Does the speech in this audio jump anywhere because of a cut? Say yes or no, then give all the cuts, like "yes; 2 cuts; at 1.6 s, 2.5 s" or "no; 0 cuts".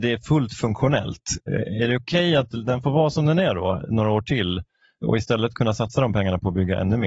no; 0 cuts